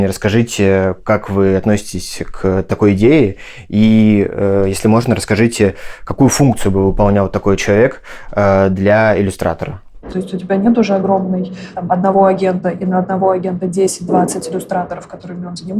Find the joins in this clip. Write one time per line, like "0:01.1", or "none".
0:10.1